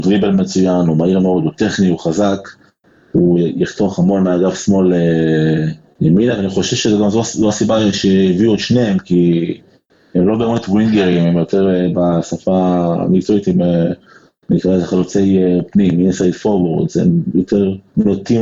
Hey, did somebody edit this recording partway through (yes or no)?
no